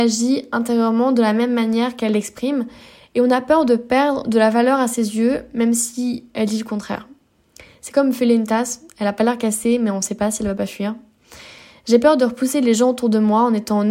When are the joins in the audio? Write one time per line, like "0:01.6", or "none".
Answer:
none